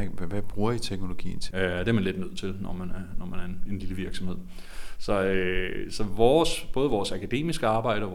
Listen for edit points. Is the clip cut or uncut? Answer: cut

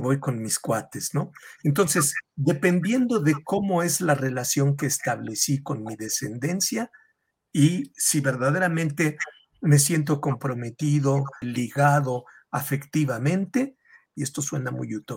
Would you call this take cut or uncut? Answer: cut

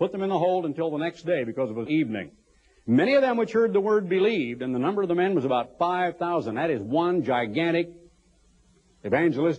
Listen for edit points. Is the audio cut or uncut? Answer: cut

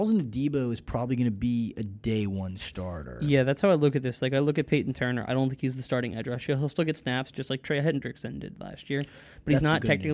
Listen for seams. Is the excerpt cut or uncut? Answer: uncut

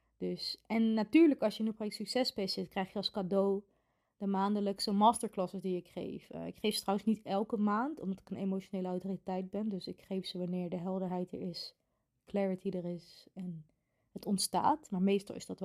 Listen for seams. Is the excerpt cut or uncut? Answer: uncut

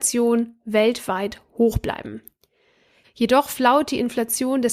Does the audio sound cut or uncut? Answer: cut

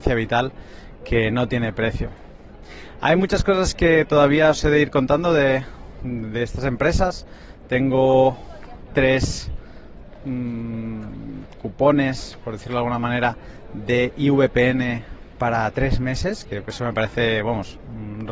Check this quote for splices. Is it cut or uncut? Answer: uncut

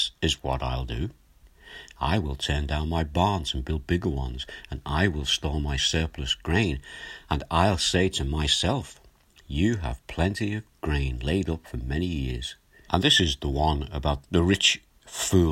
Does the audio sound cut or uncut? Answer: cut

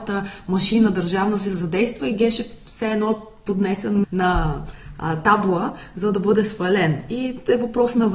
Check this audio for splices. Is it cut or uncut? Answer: cut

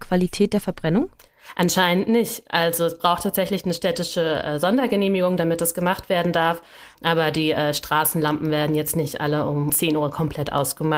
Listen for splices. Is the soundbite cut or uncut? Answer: cut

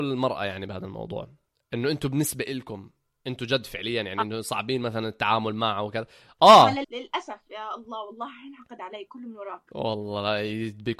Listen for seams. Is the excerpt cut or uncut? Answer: cut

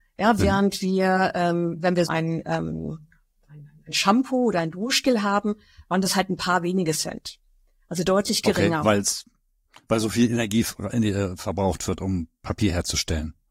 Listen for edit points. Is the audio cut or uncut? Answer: cut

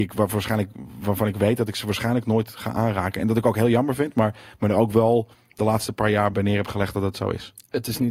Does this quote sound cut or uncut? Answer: cut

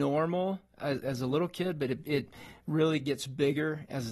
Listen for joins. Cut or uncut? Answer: uncut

